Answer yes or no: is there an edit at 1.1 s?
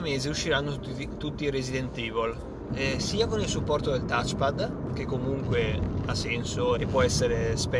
no